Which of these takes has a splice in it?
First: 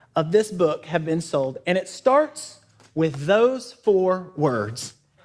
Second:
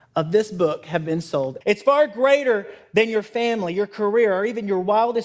second; 1 cut; at 1.6 s

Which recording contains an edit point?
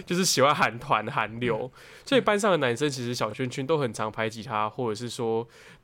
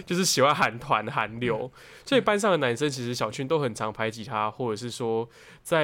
second; 1 cut; at 3.3 s

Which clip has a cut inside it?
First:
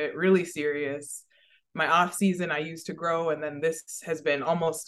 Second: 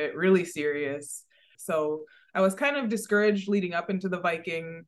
second; 1 cut; at 1.5 s

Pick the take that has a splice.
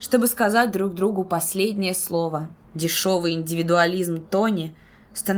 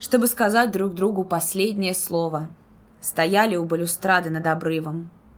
first; 1 cut; at 2.6 s

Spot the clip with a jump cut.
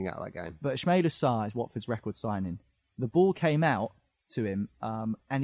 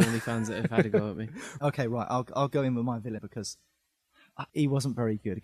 second; 2 cuts; at 3.2 s, 4.5 s

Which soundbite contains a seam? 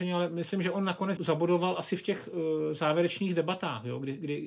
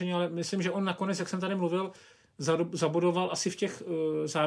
first; 1 cut; at 1.2 s

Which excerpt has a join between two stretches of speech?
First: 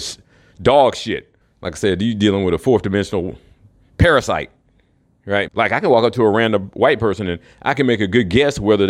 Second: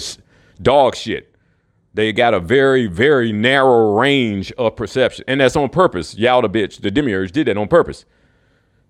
first; 2 cuts; at 1.4 s, 5.5 s

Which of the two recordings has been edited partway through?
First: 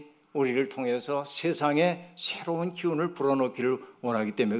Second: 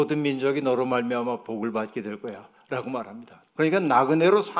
second; 1 cut; at 3.5 s

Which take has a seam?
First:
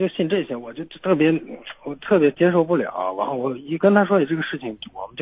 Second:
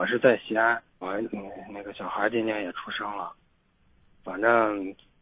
second; 1 cut; at 1.0 s

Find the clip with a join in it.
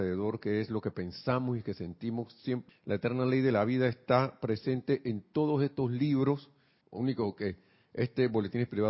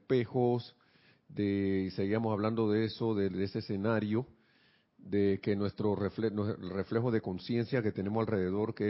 first; 2 cuts; at 2.7 s, 6.8 s

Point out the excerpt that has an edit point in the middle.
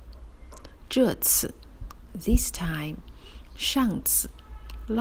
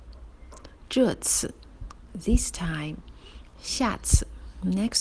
first; 1 cut; at 3.5 s

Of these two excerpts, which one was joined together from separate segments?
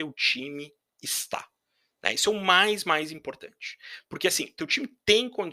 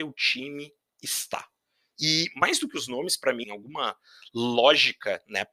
second; 2 cuts; at 1.9 s, 3.4 s

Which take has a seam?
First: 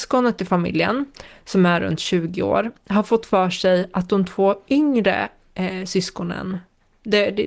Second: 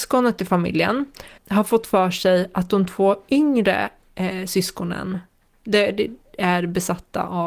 second; 1 cut; at 1.4 s

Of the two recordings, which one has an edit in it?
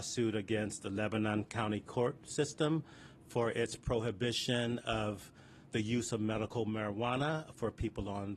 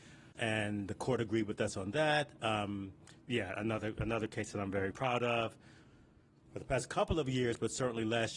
second; 1 cut; at 4.9 s

